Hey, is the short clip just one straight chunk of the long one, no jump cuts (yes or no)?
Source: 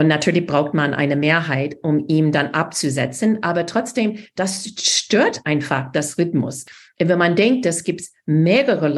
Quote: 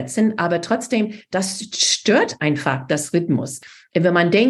yes